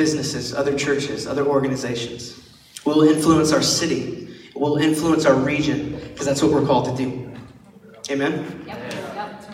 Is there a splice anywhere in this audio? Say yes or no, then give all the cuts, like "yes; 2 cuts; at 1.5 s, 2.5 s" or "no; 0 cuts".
no; 0 cuts